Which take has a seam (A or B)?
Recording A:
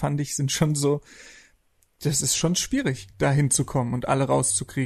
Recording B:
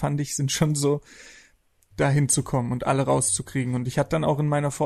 B